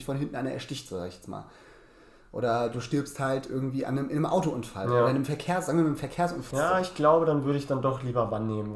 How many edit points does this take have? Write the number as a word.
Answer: one